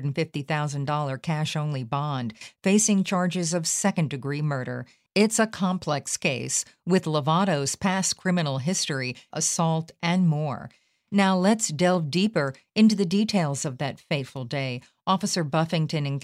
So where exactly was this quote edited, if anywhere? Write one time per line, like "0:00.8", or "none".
0:09.3